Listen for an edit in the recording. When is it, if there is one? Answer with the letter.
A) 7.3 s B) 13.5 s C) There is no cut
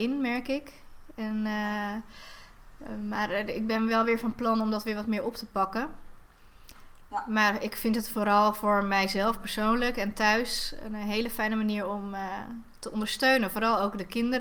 C